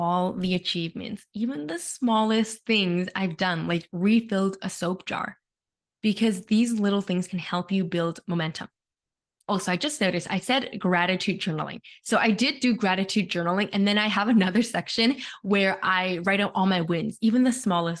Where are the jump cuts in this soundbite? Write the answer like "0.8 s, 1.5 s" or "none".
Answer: none